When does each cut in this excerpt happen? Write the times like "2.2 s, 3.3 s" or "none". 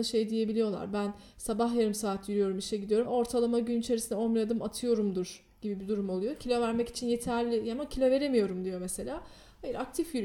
3.0 s